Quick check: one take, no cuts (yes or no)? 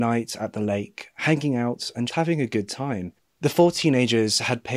no